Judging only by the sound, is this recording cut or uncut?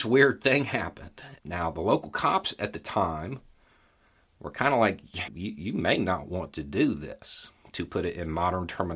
cut